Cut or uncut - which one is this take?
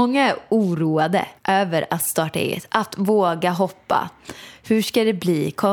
cut